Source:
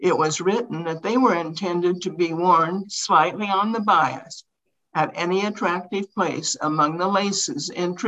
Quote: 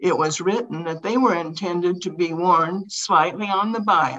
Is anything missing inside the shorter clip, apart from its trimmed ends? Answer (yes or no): no